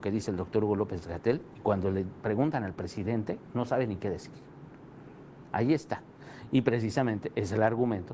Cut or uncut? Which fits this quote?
cut